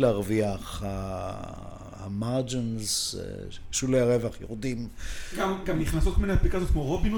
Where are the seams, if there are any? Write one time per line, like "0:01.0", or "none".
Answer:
none